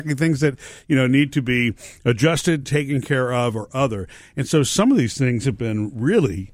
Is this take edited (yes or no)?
no